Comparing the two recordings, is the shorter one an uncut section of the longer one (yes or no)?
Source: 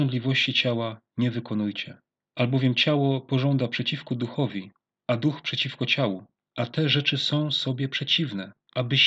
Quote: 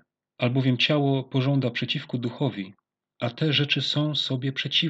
no